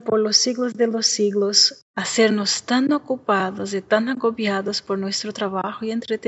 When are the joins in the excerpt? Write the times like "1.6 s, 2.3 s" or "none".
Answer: 1.8 s